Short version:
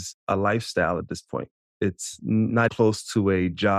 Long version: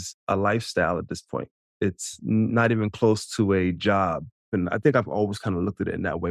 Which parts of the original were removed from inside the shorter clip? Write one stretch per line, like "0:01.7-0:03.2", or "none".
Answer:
0:02.7-0:02.9